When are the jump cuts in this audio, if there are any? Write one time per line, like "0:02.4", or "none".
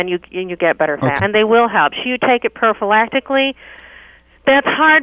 0:01.2